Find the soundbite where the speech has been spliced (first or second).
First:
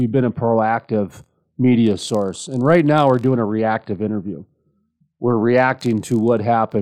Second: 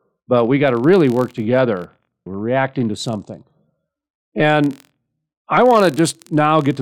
second